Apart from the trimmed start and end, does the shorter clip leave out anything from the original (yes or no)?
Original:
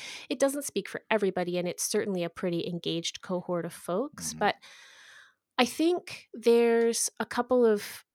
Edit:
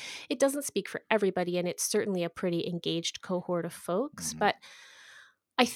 no